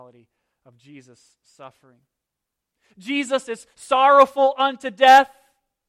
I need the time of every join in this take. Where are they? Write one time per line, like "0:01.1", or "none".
none